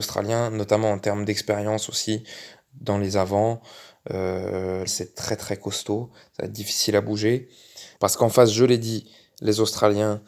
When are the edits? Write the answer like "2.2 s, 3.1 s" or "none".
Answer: 4.9 s, 8.0 s